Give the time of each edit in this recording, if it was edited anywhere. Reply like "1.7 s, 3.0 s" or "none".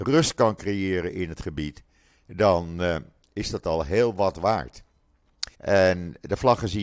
5.5 s